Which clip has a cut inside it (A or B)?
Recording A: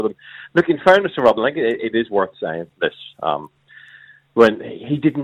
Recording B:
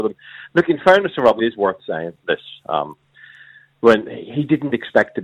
B